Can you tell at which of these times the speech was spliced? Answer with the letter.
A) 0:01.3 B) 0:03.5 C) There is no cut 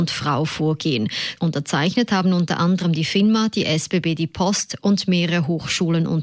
A